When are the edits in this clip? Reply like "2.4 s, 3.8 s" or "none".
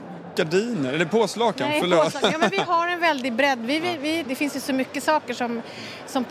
4.3 s